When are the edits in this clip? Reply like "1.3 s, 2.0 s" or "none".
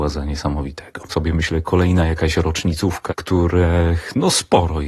1.1 s, 3.1 s